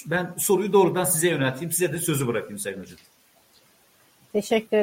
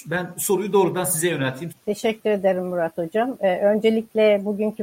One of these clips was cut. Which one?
second; 1 cut; at 1.7 s

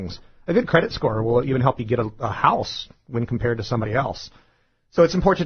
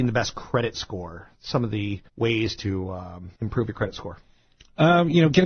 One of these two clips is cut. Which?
second; 2 cuts; at 2.1 s, 3.4 s

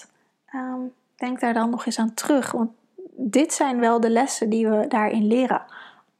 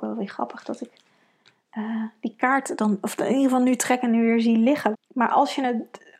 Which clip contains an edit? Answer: second; 1 cut; at 4.9 s

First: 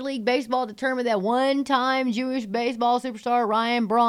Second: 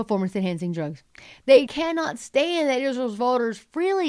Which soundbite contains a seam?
second; 1 cut; at 1.7 s

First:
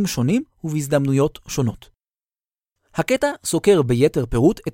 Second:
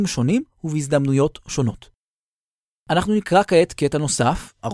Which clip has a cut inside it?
first; 1 cut; at 2.8 s

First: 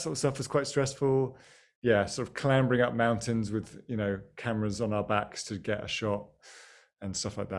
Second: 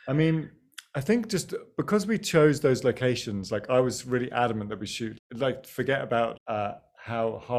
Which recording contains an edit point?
second; 2 cuts; at 5.2 s, 6.4 s

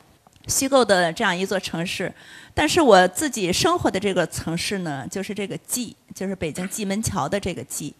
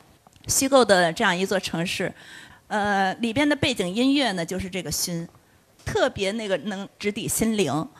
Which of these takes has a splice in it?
second; 2 cuts; at 2.5 s, 5.7 s

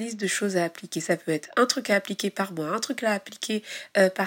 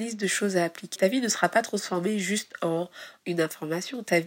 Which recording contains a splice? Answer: second; 2 cuts; at 1.0 s, 3.2 s

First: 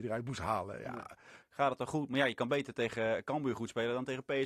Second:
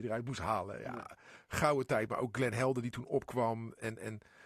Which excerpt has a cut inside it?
first; 1 cut; at 1.4 s

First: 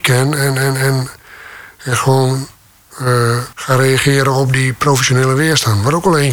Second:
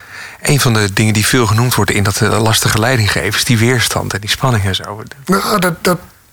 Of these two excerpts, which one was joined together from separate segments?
first; 1 cut; at 3.5 s

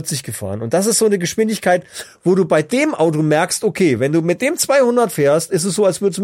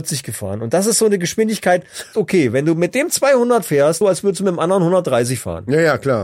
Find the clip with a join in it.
second; 2 cuts; at 2.1 s, 4.0 s

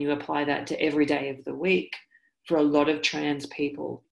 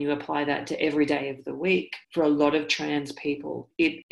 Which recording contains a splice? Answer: second; 1 cut; at 2.0 s

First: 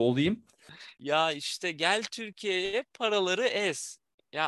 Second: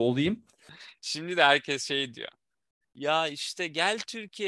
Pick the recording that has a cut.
first; 1 cut; at 1.0 s

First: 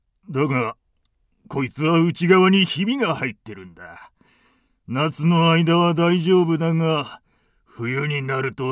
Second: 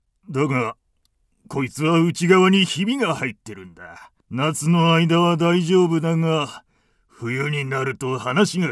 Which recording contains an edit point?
second; 1 cut; at 4.2 s

